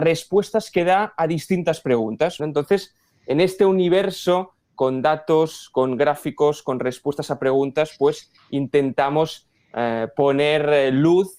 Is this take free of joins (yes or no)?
no